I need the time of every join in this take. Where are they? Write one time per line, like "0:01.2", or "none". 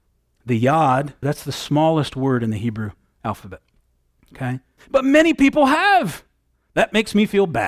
0:01.2
0:04.8
0:06.6